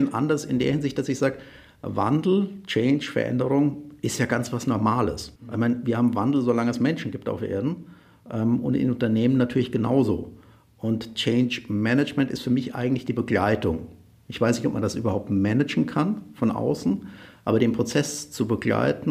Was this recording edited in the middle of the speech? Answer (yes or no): yes